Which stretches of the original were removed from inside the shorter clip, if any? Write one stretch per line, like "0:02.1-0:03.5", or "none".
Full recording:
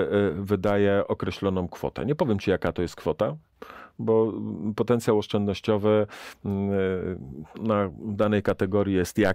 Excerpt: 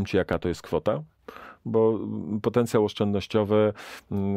none